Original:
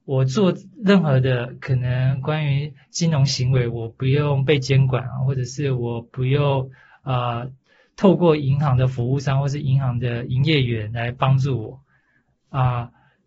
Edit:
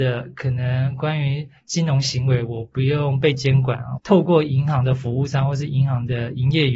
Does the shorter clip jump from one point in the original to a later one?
yes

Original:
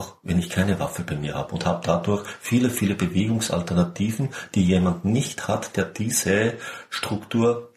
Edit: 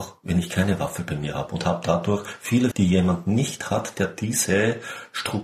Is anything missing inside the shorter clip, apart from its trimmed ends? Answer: yes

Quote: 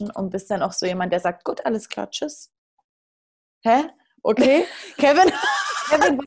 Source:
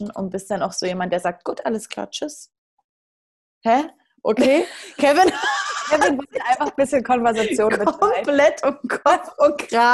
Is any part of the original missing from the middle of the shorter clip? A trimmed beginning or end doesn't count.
no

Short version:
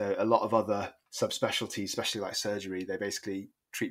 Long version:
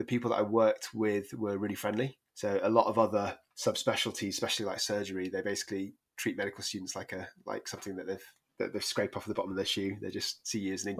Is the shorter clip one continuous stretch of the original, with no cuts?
yes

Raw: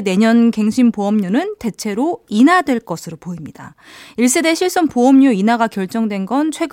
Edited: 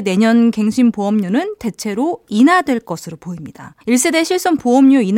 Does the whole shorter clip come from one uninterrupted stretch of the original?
no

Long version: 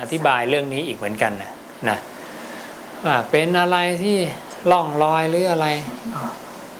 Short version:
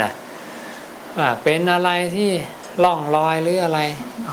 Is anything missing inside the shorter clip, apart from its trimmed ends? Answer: no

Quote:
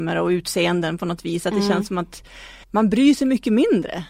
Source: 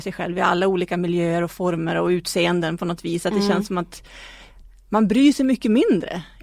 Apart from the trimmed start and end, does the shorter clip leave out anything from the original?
yes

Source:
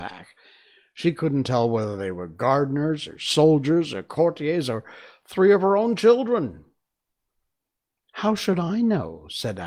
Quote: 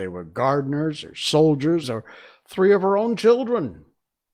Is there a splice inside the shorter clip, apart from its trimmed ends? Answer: yes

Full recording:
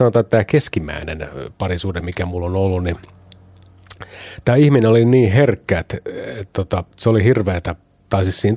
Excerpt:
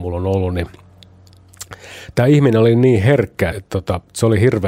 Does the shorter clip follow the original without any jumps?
no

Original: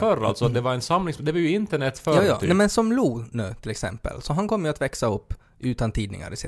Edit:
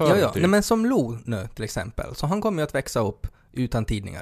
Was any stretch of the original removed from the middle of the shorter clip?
no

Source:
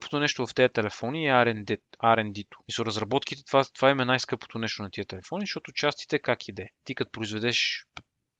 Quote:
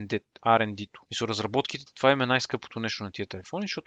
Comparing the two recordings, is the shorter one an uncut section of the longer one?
no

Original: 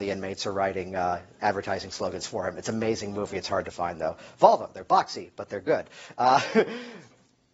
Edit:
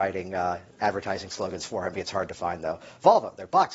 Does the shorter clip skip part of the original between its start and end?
yes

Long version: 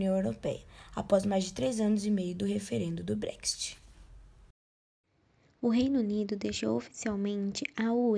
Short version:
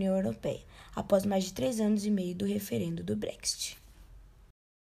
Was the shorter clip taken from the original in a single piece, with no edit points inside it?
yes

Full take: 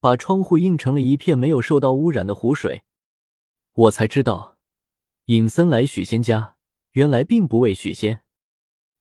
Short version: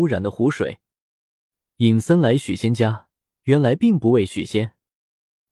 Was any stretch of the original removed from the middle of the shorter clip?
yes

